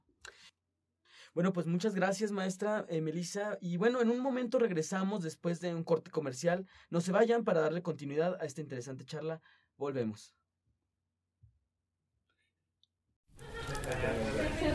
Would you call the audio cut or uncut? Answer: uncut